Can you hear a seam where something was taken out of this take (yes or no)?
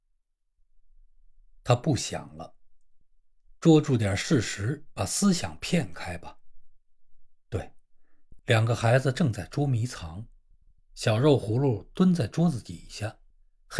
yes